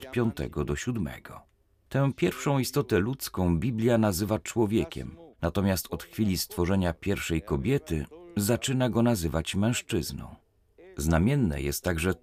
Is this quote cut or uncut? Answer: cut